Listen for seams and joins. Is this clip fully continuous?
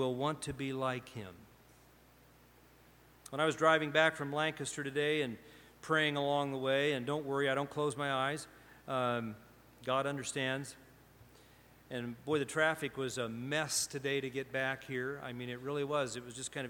yes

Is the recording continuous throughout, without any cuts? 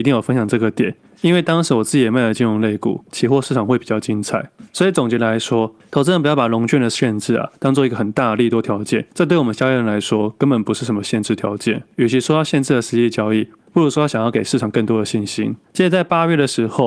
no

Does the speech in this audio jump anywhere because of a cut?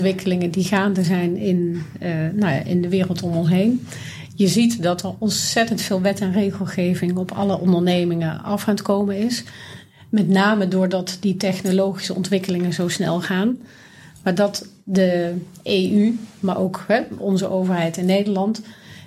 no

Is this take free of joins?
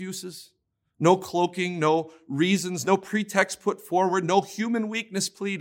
yes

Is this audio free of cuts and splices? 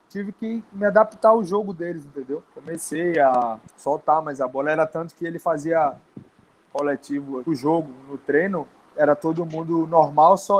no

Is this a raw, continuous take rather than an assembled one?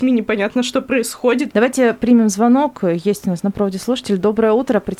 no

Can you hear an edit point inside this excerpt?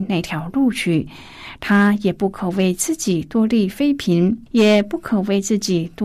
yes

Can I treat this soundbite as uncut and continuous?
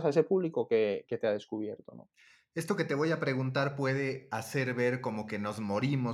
yes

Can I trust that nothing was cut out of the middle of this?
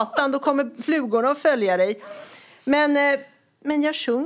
yes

